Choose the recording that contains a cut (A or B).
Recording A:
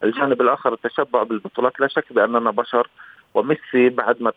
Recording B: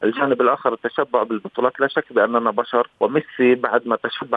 B